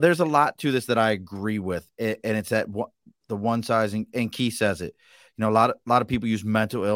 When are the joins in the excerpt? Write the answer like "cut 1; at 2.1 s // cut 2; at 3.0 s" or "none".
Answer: none